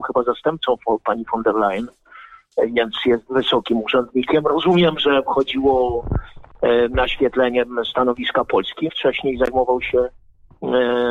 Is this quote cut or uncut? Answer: cut